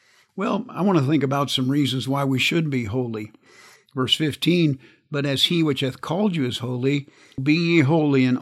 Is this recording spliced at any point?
yes; 2 cuts; at 3.8 s, 7.4 s

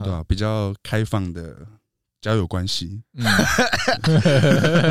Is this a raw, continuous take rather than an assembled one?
yes; 0 cuts

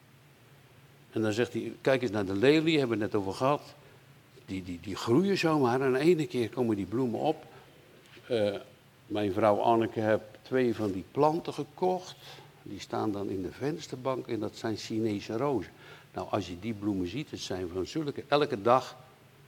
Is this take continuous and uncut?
yes; 0 cuts

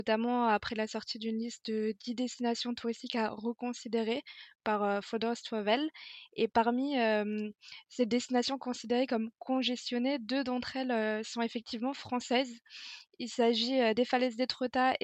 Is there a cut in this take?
no; 0 cuts

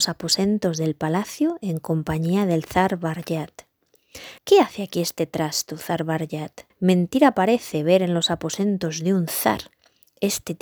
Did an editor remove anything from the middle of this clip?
yes; 2 cuts; at 4.4 s, 6.7 s

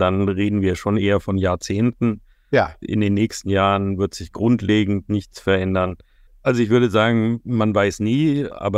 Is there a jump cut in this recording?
yes; 2 cuts; at 4.3 s, 6.3 s

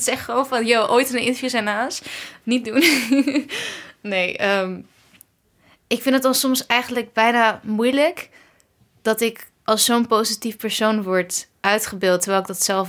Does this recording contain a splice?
no; 0 cuts

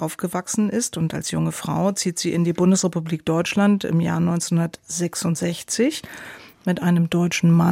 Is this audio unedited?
yes; 0 cuts

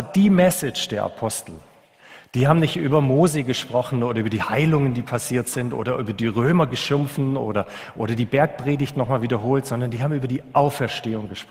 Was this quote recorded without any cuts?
yes; 0 cuts

